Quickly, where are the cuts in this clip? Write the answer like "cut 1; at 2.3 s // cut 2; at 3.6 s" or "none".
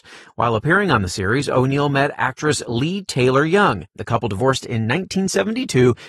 cut 1; at 3.9 s